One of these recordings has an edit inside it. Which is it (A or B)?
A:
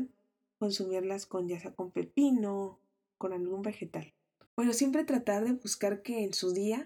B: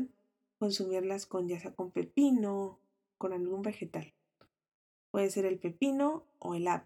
A